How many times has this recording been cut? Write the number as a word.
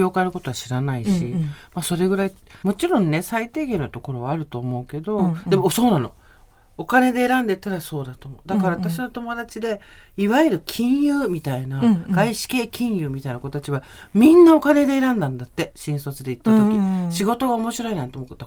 one